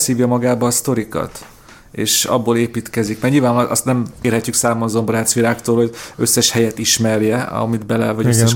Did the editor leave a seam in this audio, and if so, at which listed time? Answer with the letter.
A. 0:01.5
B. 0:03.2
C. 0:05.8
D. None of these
D